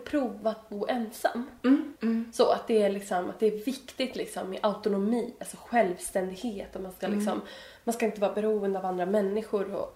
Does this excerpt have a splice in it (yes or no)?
yes